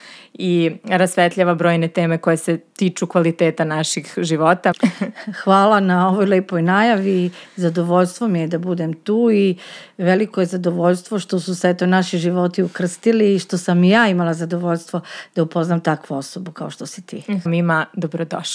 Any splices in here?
yes; 2 cuts; at 4.7 s, 17.5 s

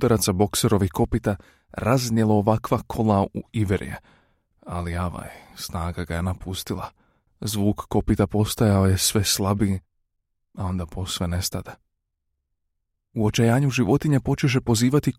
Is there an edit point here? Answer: no; 0 cuts

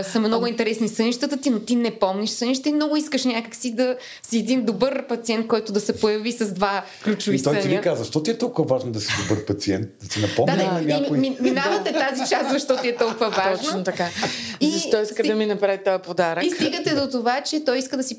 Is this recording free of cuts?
yes; 0 cuts

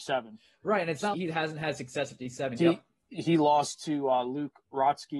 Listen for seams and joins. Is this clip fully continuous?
no; 2 cuts; at 1.1 s, 2.6 s

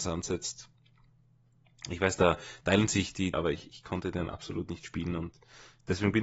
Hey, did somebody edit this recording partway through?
yes; 1 cut; at 3.3 s

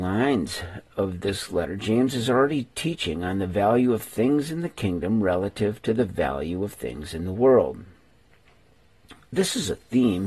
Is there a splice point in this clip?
no; 0 cuts

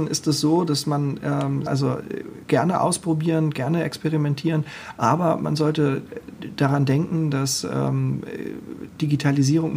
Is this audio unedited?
no; 1 cut; at 1.7 s

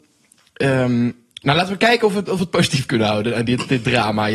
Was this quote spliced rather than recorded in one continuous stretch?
no; 0 cuts

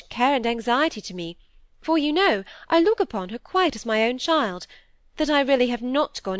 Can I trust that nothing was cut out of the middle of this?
yes; 0 cuts

